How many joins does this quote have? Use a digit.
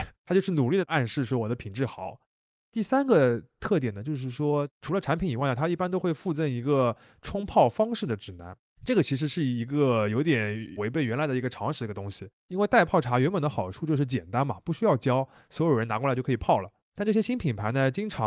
0